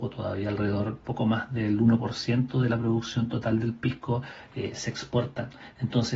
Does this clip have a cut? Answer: no; 0 cuts

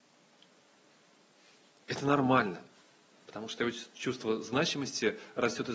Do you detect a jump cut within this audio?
yes; 1 cut; at 3.1 s

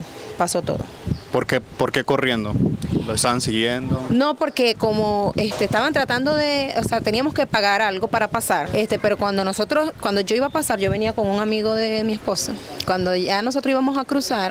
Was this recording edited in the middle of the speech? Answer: yes; 1 cut; at 8.7 s

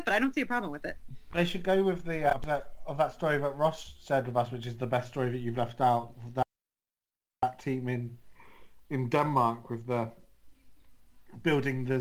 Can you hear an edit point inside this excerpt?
no; 0 cuts

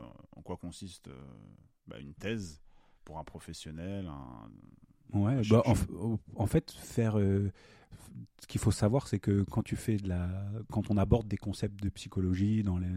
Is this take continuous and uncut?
yes; 0 cuts

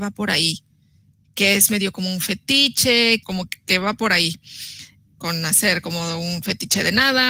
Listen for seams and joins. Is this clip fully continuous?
no; 2 cuts; at 3.2 s, 5.2 s

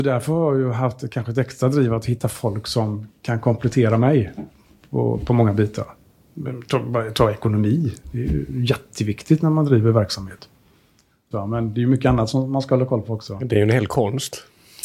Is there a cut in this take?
yes; 1 cut; at 11.3 s

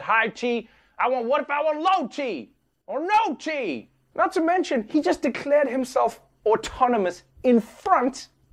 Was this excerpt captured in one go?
no; 1 cut; at 4.1 s

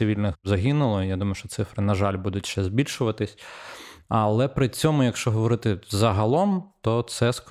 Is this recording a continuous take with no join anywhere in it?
yes; 0 cuts

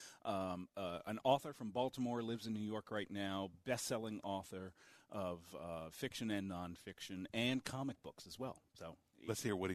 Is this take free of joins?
yes; 0 cuts

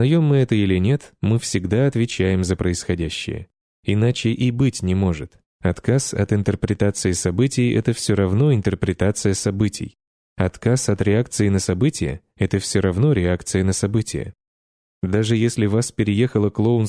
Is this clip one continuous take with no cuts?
yes; 0 cuts

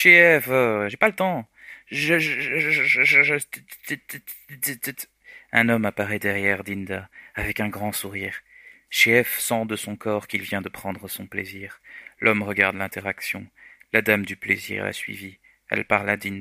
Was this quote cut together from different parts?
no; 0 cuts

